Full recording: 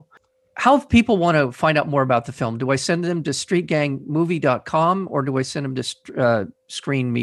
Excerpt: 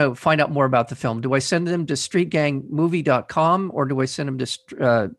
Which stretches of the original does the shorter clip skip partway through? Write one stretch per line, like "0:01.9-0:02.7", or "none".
none